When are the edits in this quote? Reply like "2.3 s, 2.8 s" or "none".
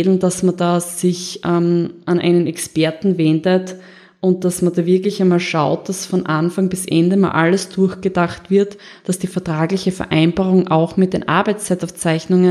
none